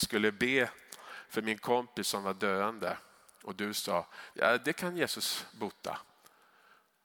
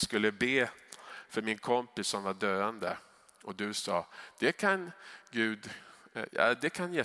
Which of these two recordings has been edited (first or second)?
first